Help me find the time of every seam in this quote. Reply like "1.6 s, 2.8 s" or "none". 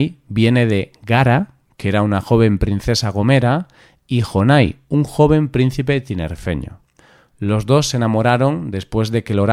none